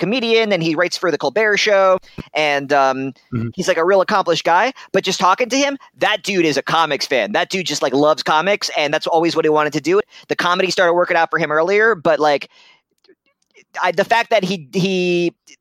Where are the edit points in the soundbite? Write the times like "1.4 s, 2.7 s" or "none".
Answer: 10.0 s